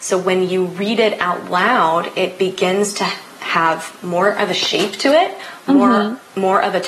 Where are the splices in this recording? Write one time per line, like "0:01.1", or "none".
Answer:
none